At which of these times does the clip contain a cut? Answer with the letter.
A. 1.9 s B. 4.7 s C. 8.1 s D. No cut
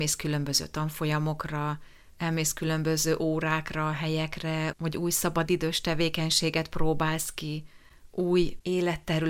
B